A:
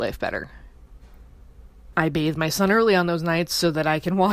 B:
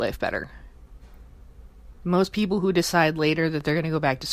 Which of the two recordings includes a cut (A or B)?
A